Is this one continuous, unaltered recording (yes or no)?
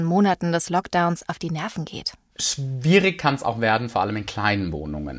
yes